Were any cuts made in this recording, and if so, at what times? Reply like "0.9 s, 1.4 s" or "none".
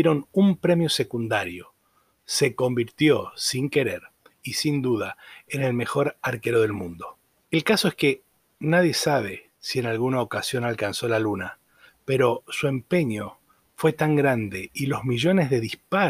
7.4 s, 9.6 s